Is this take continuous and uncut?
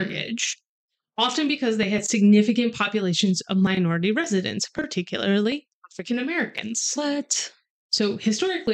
yes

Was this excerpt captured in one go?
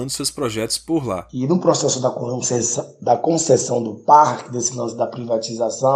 yes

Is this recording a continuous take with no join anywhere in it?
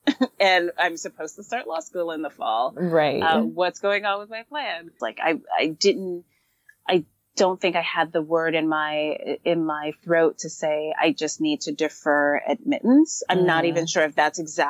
no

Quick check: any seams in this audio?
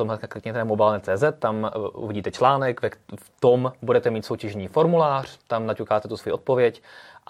no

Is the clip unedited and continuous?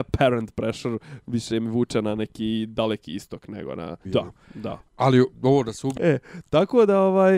no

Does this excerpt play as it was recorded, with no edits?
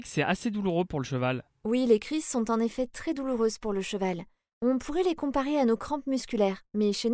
yes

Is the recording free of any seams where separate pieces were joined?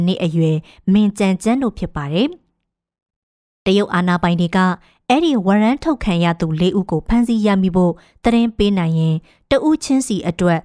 yes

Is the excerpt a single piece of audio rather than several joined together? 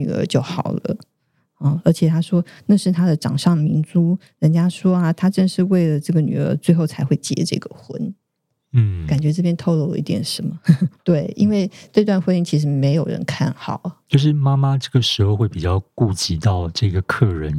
no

